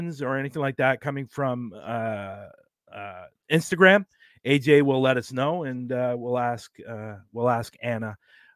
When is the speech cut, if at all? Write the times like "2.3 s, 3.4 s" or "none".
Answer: none